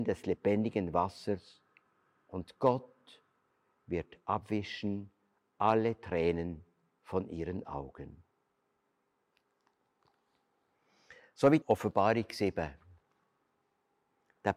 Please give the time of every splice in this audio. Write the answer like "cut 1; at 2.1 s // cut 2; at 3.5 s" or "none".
cut 1; at 11.6 s